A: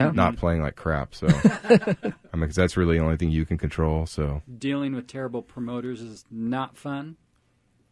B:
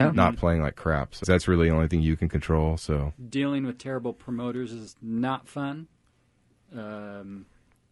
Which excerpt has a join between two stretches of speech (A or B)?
B